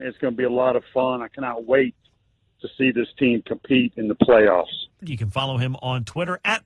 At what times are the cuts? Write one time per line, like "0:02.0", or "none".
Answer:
0:05.0